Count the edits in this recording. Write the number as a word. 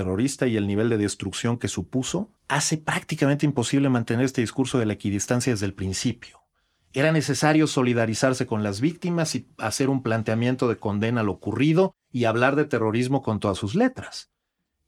one